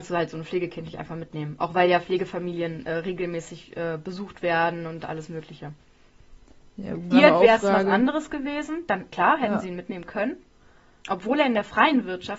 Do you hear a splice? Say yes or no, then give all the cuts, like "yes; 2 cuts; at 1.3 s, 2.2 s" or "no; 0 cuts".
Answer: yes; 2 cuts; at 7.1 s, 11.0 s